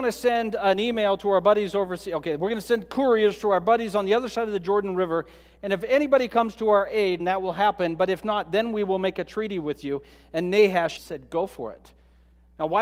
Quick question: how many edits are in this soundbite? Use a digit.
2